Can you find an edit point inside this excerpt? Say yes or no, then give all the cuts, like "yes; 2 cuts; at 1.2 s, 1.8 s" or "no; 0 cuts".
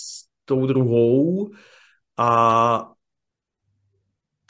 no; 0 cuts